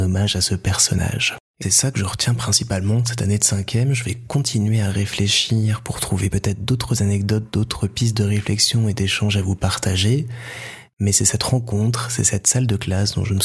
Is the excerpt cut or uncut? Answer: cut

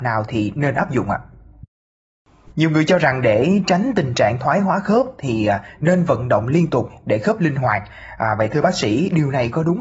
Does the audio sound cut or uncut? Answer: cut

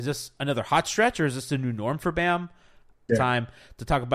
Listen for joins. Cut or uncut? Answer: cut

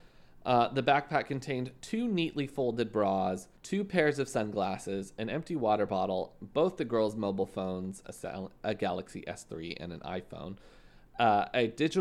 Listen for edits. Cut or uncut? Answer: cut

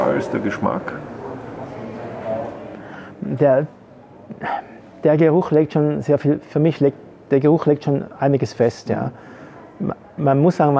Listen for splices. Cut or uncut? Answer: uncut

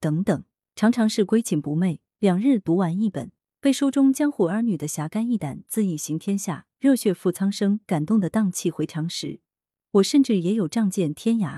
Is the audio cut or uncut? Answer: uncut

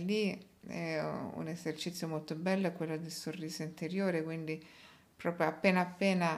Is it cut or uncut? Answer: uncut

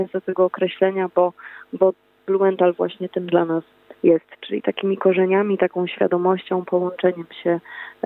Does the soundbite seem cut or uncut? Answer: uncut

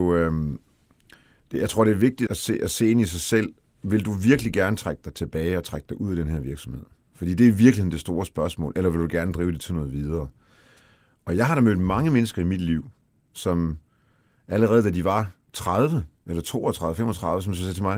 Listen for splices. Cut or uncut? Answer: cut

